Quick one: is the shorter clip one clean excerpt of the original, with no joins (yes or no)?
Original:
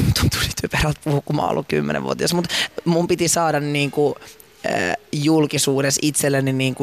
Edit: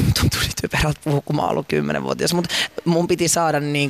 yes